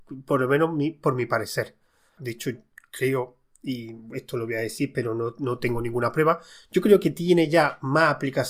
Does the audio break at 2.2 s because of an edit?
yes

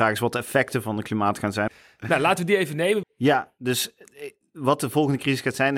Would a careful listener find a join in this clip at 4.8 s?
no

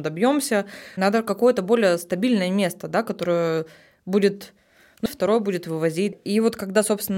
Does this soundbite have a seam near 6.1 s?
yes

